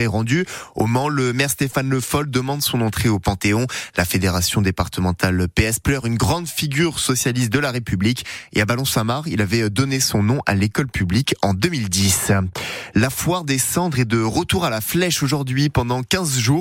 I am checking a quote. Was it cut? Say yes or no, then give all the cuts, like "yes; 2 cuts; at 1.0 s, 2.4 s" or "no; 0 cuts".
no; 0 cuts